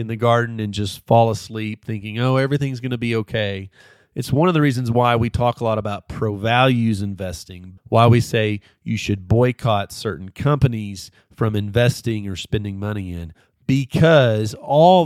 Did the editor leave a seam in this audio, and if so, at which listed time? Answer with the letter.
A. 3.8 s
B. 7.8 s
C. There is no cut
B